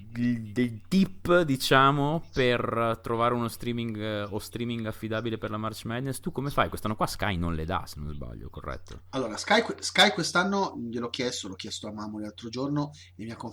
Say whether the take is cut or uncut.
uncut